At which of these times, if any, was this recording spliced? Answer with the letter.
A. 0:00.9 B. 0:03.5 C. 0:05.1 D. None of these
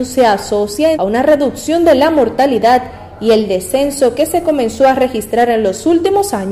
A